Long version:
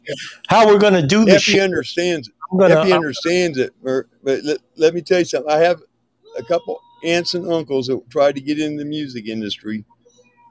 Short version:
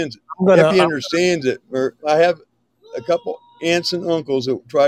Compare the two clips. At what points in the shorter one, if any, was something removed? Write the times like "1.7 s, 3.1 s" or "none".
2.0 s